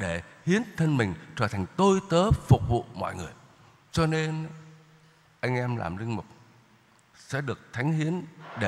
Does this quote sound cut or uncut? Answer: cut